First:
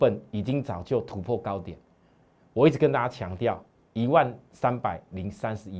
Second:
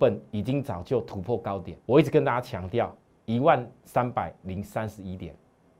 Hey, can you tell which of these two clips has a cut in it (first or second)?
second